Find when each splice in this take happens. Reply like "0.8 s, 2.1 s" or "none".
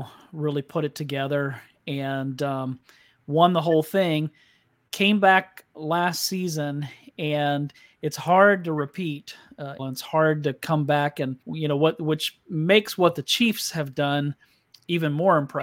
9.8 s, 11.4 s